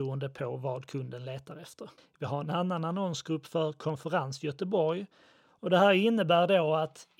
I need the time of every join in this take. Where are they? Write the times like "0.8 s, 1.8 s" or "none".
2.0 s, 5.6 s